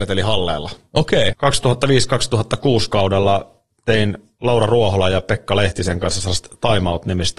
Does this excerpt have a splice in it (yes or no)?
yes